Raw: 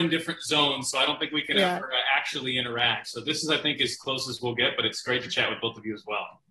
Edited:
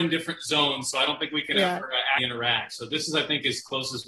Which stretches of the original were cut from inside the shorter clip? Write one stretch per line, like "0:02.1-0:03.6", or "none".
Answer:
0:02.2-0:02.5